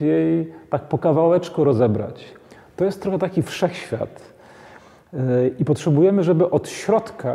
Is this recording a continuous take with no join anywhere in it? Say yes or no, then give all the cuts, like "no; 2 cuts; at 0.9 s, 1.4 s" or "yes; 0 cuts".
yes; 0 cuts